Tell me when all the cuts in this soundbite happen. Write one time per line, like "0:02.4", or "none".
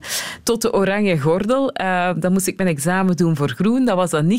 none